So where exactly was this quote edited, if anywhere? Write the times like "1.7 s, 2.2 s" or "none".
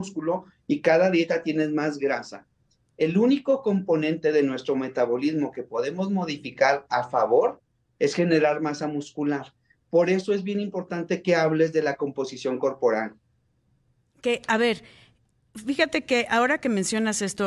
none